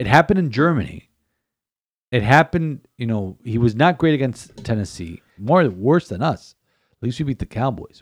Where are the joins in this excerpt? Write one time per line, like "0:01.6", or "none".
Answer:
0:05.4